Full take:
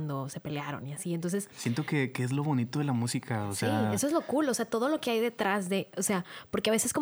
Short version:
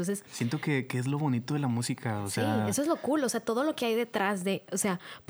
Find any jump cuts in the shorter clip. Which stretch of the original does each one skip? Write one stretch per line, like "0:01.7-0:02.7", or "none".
none